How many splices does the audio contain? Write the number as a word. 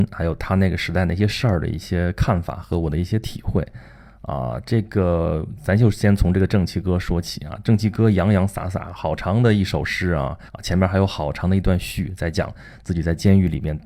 one